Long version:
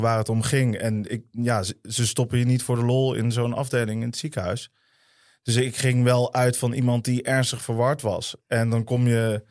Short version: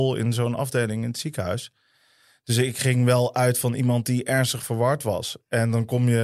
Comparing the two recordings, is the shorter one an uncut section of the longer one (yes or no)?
yes